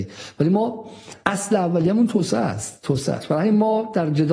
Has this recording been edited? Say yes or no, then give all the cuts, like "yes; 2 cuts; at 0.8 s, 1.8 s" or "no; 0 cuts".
yes; 1 cut; at 1.2 s